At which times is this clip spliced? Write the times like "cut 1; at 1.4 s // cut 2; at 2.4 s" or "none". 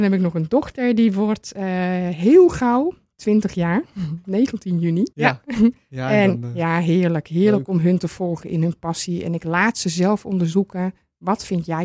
cut 1; at 5.1 s